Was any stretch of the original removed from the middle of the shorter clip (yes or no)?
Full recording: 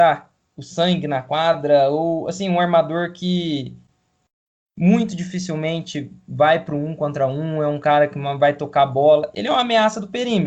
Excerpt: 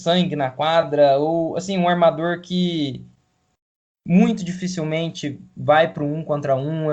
no